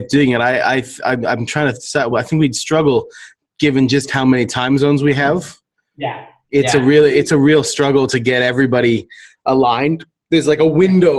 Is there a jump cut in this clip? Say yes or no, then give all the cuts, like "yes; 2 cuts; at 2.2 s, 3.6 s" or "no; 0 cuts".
no; 0 cuts